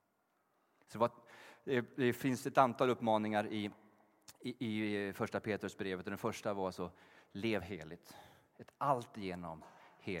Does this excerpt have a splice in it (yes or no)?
no